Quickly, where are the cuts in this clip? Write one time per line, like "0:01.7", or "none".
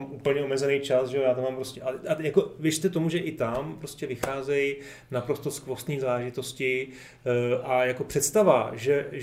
0:01.7